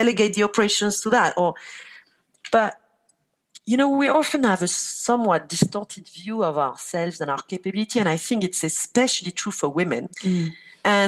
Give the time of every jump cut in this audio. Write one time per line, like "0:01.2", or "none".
0:10.1